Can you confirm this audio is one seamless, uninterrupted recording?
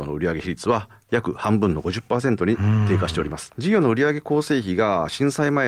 no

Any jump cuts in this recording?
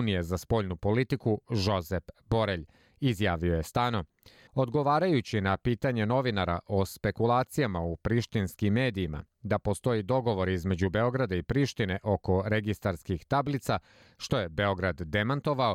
yes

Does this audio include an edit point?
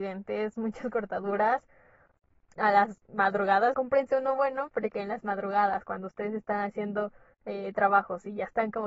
yes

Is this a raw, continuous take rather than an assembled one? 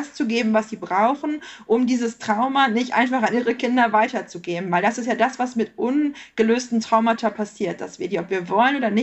yes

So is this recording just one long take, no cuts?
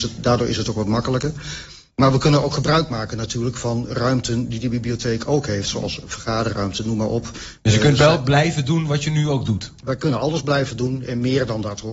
yes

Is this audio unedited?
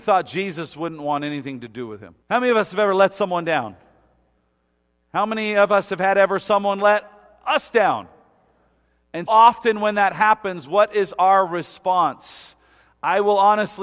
no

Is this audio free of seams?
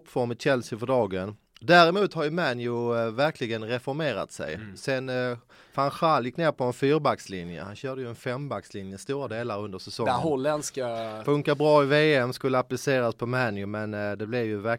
no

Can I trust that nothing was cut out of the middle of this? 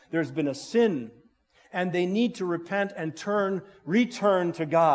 yes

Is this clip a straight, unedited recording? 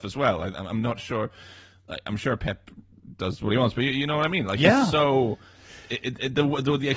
yes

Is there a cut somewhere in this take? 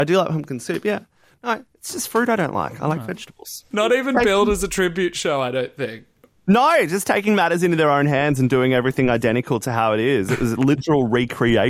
yes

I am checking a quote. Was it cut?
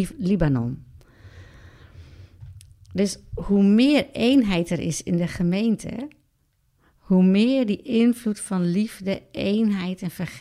no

